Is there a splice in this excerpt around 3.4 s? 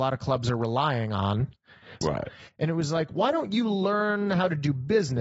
no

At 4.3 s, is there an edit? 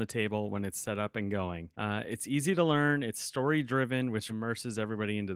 yes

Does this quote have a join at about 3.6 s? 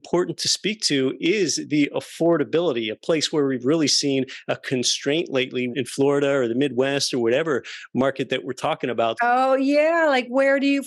no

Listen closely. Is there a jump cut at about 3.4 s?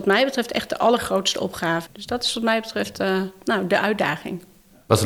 no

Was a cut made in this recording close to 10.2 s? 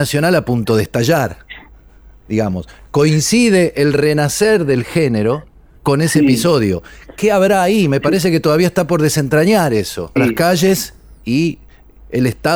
yes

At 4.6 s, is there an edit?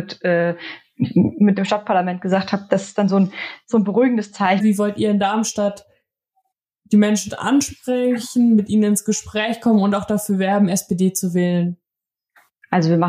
yes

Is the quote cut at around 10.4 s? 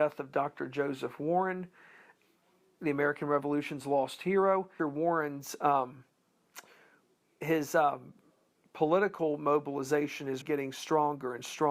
yes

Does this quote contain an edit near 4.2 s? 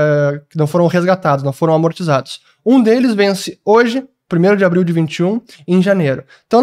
no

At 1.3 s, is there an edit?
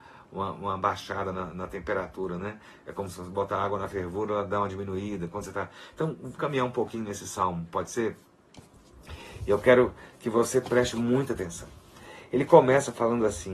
no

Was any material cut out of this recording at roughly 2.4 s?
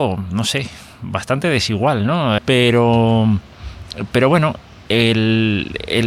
yes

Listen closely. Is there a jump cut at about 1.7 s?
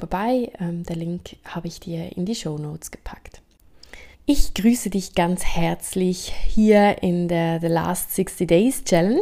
no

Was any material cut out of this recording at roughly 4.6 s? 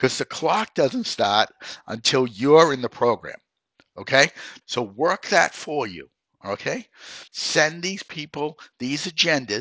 yes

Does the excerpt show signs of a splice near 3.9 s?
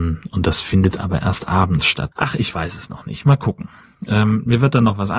no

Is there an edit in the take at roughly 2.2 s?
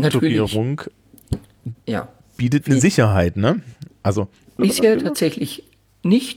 no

